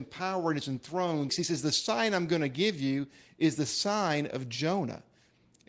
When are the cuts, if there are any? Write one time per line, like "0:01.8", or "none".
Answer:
0:01.3

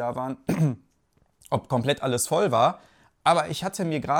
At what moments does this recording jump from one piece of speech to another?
0:03.2

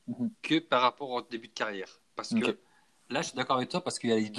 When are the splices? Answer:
none

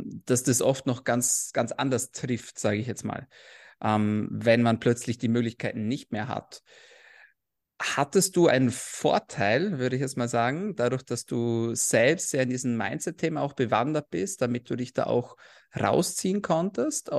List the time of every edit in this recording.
none

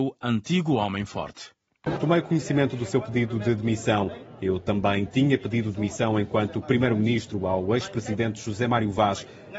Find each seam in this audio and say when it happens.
0:02.0

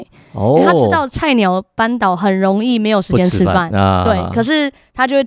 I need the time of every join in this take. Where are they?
none

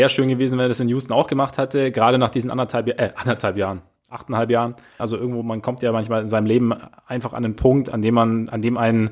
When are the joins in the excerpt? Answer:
0:05.0

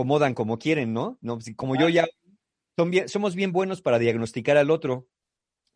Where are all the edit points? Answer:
none

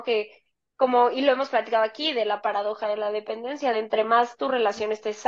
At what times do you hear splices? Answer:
none

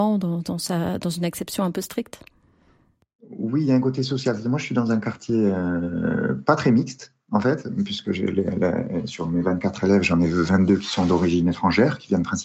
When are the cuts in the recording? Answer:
none

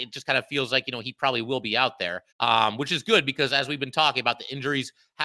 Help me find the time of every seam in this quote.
0:02.3

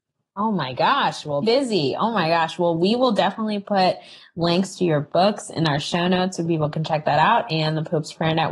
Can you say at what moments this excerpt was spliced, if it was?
0:01.4

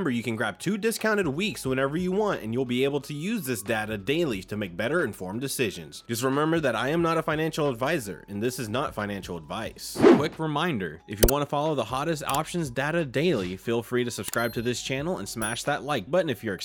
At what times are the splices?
none

